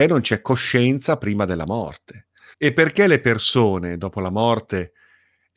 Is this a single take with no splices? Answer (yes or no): no